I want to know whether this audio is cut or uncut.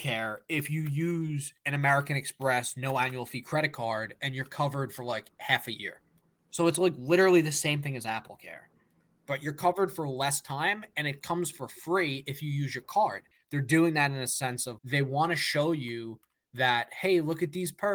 cut